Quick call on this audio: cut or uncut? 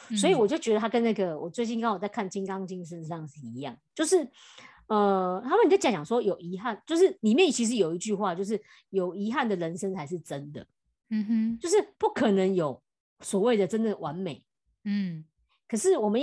uncut